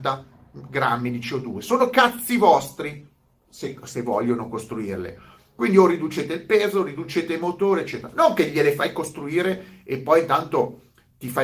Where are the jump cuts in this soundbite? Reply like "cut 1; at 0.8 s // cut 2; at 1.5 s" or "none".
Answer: none